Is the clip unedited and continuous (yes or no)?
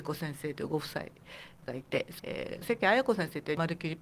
yes